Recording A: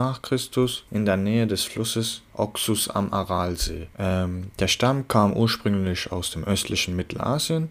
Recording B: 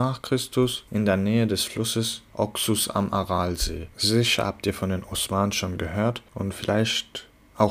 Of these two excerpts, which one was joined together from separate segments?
B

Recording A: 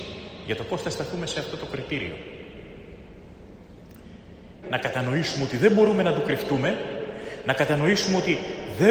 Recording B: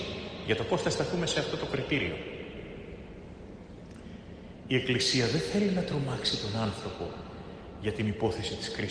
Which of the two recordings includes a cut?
A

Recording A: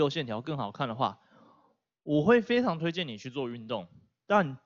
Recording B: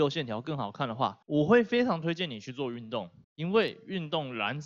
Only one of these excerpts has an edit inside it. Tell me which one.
B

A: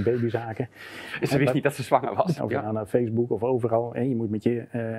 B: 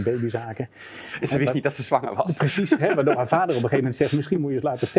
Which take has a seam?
A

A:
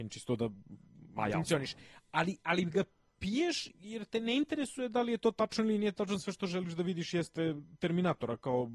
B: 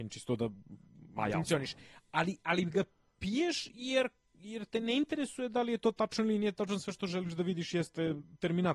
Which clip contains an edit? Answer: A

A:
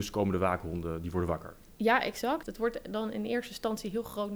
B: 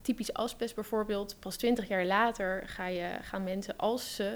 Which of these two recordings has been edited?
A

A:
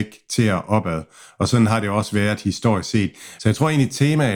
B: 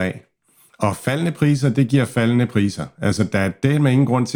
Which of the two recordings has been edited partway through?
A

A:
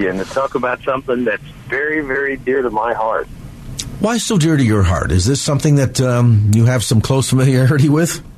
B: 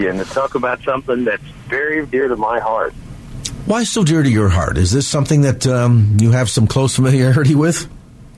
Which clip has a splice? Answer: B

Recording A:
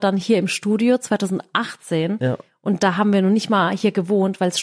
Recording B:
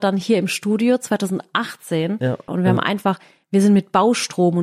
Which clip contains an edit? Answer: B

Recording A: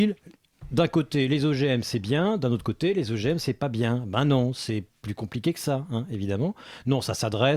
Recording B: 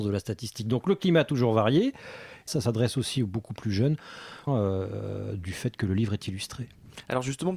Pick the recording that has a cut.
B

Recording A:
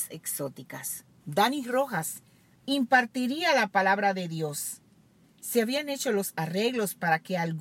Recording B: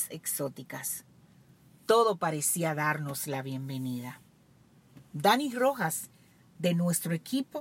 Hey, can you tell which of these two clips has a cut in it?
A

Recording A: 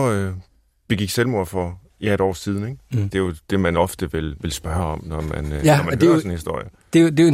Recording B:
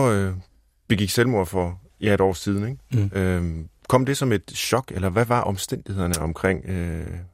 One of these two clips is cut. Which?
A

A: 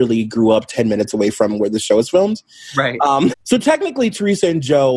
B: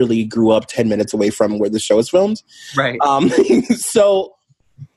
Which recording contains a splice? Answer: A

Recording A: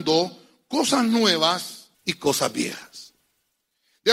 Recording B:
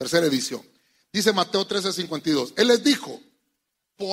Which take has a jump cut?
A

